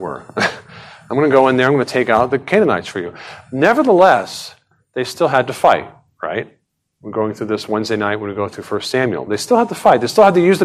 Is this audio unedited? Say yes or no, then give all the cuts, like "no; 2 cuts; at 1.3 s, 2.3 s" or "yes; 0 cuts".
yes; 0 cuts